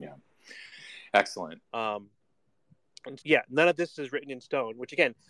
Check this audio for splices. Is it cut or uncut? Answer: cut